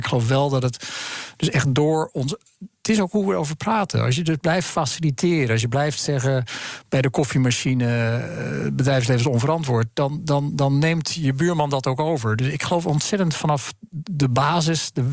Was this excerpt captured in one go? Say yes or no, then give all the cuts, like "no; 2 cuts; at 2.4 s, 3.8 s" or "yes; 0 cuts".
yes; 0 cuts